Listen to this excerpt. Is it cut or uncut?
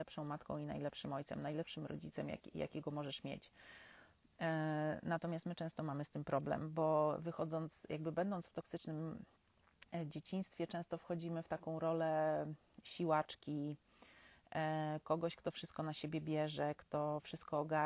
uncut